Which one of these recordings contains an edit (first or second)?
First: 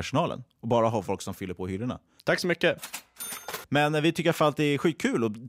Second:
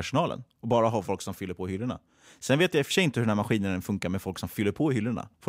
first